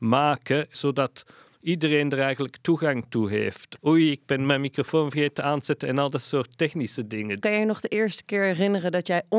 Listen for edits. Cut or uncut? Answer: cut